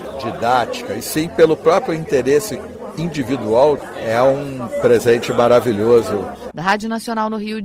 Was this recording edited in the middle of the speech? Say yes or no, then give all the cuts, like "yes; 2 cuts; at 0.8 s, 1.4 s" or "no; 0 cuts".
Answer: yes; 1 cut; at 6.5 s